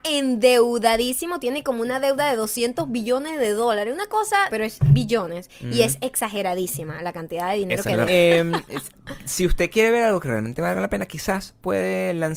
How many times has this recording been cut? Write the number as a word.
two